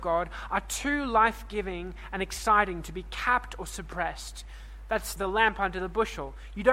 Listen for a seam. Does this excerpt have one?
yes; 1 cut; at 5.2 s

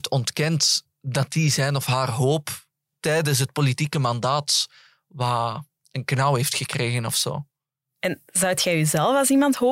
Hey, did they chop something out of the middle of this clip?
no; 0 cuts

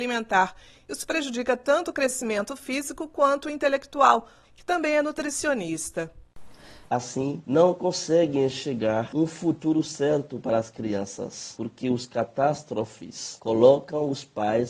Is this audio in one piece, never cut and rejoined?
no; 2 cuts; at 4.4 s, 6.9 s

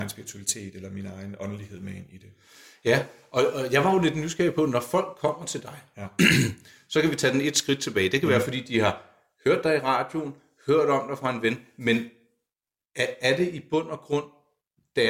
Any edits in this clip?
no; 0 cuts

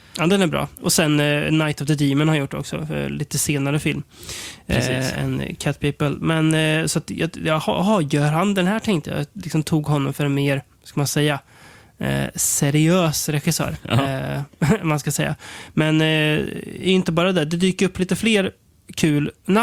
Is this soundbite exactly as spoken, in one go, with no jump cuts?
yes; 0 cuts

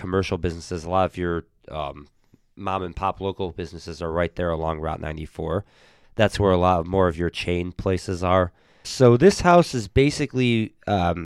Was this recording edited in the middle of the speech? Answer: yes; 2 cuts; at 6.0 s, 8.8 s

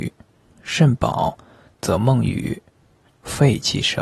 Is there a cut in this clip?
yes; 1 cut; at 3.1 s

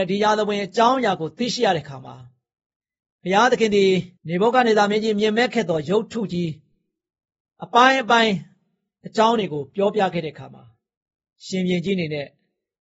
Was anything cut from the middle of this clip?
yes; 1 cut; at 4.2 s

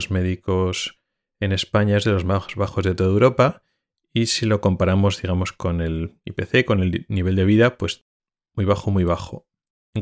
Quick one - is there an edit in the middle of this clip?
no; 0 cuts

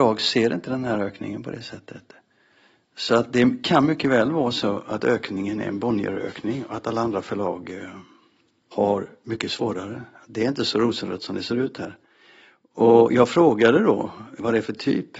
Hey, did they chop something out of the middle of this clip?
no; 0 cuts

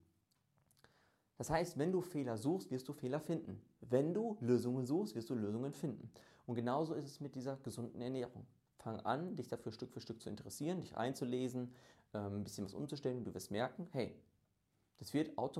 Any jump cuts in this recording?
no; 0 cuts

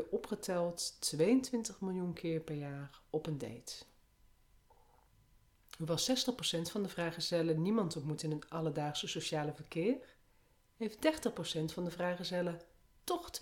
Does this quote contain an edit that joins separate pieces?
no; 0 cuts

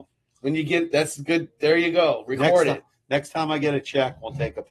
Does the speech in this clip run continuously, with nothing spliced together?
yes; 0 cuts

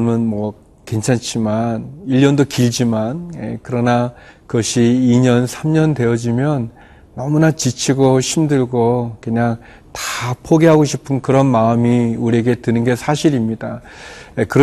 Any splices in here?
no; 0 cuts

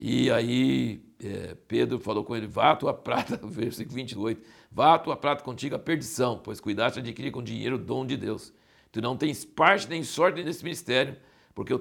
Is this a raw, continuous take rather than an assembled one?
yes; 0 cuts

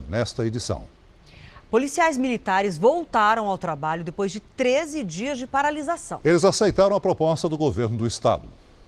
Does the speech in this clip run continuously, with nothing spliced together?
no; 1 cut; at 1.6 s

